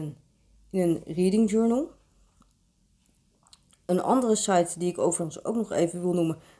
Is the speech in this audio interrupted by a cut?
no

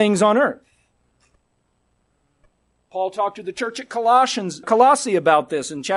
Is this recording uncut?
no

